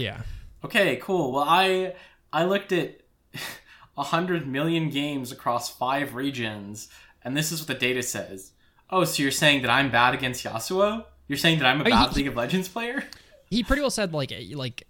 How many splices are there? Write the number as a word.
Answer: zero